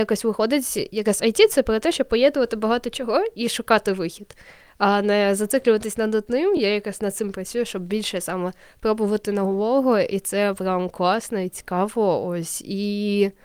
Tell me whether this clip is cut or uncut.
uncut